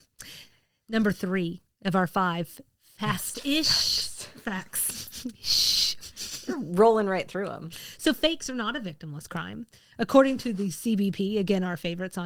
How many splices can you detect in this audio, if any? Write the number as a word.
zero